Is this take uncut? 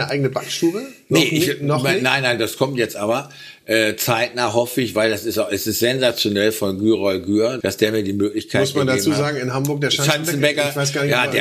no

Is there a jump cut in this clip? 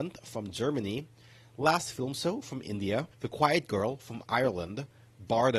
yes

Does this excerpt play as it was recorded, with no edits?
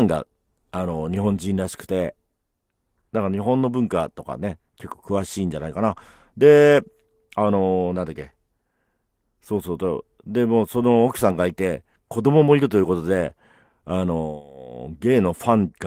yes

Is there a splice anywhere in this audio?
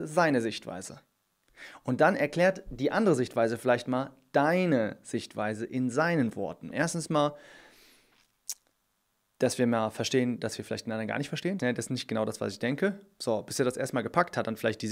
yes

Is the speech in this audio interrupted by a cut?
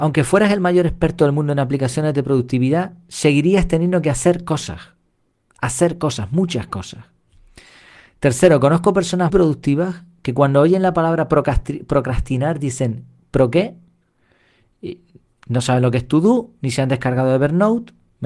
yes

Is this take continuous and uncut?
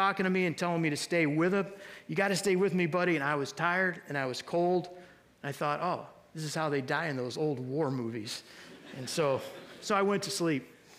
yes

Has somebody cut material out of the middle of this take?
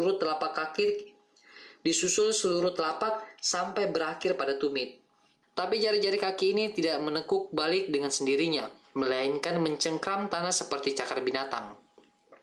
yes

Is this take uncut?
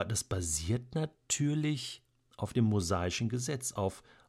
yes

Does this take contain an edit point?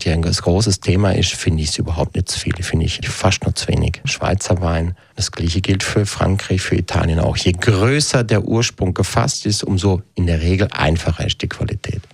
yes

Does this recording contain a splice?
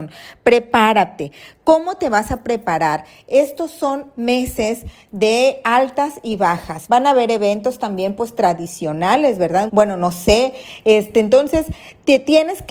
yes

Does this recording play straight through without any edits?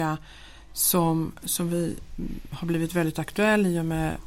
yes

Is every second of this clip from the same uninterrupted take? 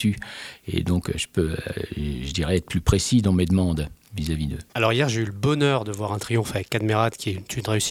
no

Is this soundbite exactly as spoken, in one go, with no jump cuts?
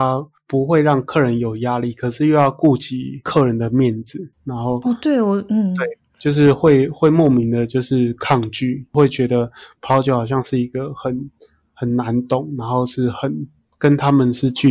no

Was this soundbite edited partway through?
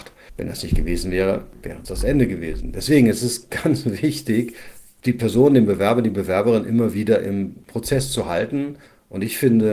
yes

